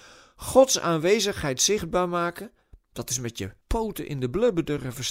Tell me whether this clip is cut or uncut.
cut